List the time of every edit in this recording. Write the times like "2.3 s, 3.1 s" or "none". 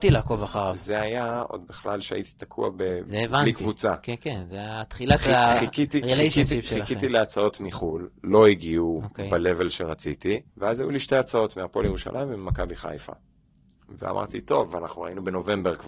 10.5 s